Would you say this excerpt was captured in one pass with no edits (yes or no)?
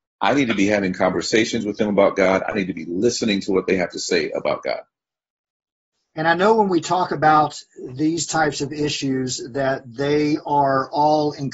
yes